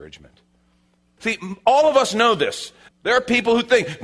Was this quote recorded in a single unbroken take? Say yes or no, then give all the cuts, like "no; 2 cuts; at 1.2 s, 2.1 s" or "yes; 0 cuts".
no; 2 cuts; at 1.2 s, 2.9 s